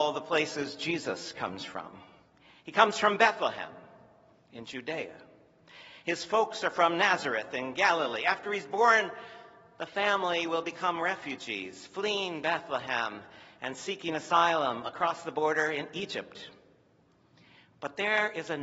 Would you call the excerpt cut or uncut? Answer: uncut